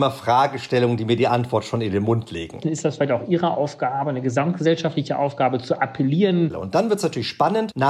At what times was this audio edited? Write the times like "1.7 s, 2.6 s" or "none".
2.6 s, 6.5 s